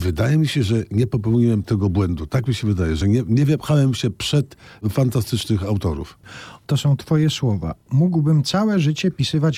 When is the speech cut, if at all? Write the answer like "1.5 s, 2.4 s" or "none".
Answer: none